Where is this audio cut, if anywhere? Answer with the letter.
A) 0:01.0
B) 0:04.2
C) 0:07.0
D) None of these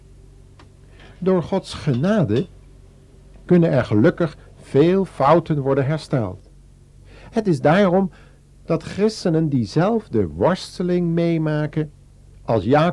C